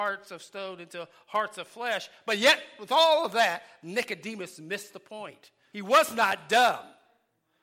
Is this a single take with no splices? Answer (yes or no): no